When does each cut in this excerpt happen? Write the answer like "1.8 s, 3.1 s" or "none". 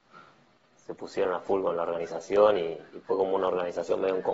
none